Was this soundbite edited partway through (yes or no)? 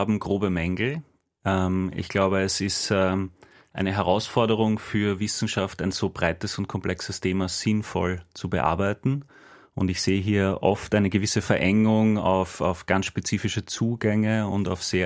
no